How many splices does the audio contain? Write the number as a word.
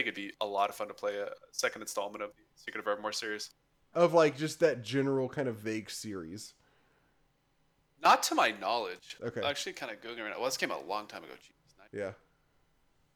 one